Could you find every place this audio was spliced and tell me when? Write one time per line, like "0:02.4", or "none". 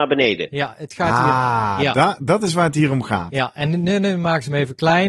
none